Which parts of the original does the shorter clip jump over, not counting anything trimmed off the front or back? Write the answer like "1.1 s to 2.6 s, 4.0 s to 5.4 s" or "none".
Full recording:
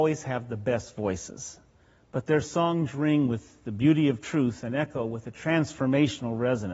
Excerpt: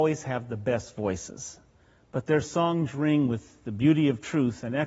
none